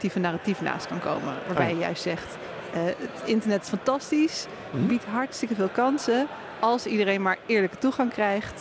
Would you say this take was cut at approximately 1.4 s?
no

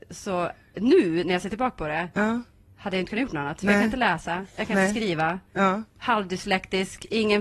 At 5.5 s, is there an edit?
no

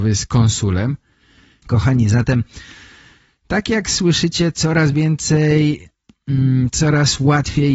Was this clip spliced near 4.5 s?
no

